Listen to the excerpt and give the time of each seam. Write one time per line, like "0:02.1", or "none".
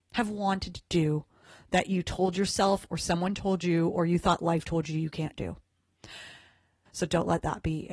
0:06.9